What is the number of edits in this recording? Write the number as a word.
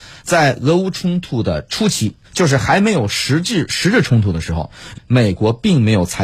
two